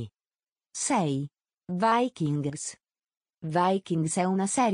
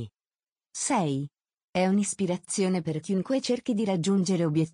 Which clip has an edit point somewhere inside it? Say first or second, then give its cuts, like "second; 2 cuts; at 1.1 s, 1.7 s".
second; 1 cut; at 1.6 s